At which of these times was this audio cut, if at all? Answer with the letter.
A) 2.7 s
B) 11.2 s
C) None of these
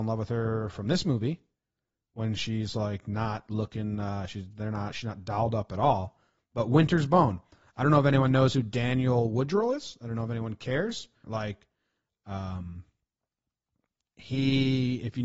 B